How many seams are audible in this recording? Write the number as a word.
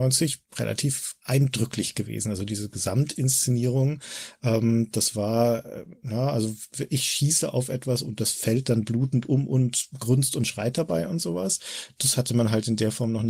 zero